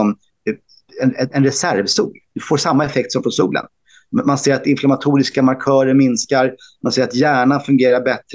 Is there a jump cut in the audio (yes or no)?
no